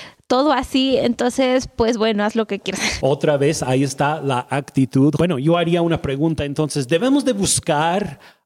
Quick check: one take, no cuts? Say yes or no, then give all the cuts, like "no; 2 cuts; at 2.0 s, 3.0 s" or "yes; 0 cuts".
no; 2 cuts; at 3.0 s, 5.2 s